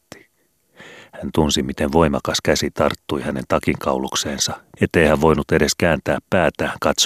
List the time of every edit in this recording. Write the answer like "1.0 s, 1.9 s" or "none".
4.7 s